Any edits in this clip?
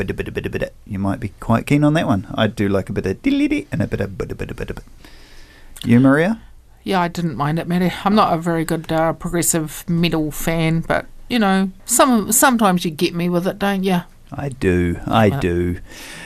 yes; 1 cut; at 11.8 s

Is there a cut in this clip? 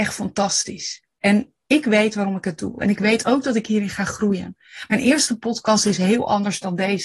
no; 0 cuts

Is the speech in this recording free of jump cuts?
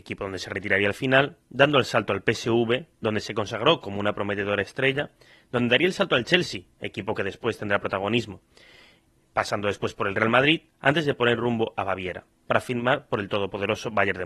yes; 0 cuts

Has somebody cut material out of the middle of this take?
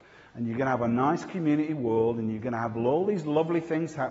no; 0 cuts

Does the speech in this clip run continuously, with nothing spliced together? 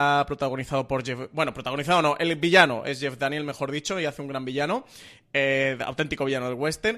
yes; 0 cuts

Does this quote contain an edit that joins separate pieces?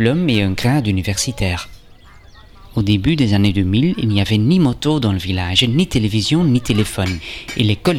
no; 0 cuts

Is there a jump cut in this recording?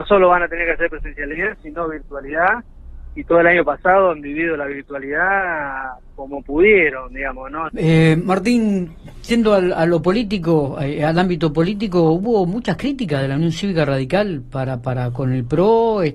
yes; 1 cut; at 7.7 s

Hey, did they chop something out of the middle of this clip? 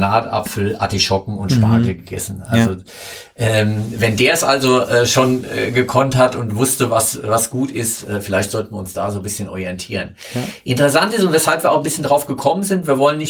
no; 0 cuts

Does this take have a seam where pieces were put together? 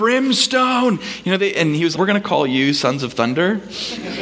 yes; 1 cut; at 1.9 s

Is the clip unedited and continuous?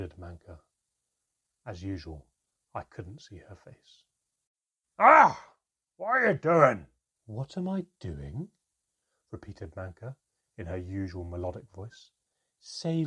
no; 1 cut; at 7.1 s

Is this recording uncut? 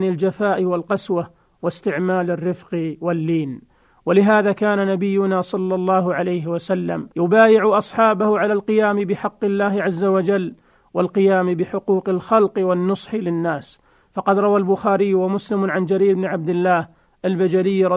no; 1 cut; at 7.1 s

